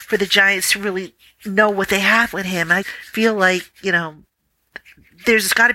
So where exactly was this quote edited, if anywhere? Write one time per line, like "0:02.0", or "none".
0:02.8